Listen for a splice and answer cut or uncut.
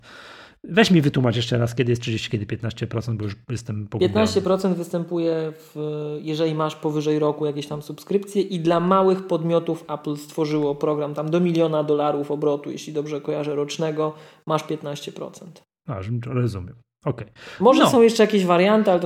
uncut